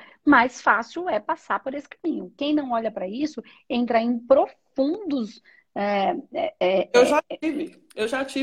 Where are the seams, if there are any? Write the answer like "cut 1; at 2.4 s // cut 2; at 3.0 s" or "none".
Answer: none